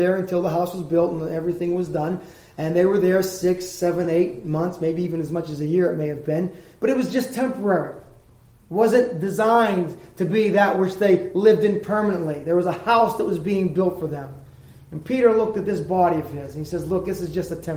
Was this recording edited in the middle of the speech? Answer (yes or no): no